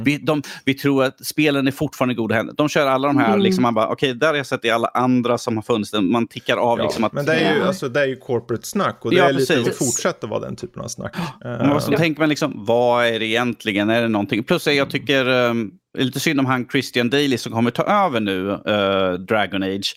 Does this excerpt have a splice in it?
yes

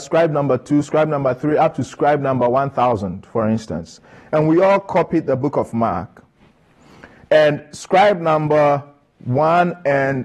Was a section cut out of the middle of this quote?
no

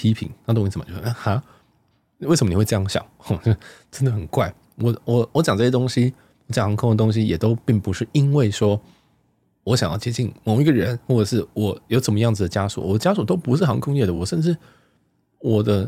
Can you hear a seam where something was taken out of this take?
no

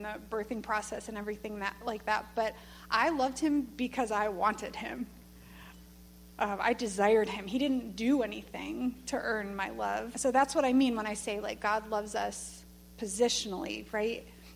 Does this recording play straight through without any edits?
no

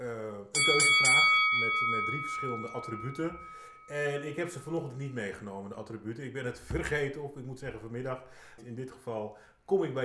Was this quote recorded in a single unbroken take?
no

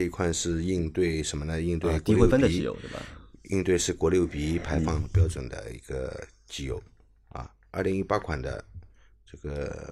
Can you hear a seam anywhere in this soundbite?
no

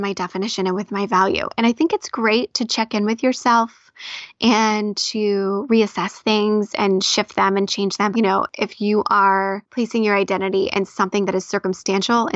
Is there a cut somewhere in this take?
yes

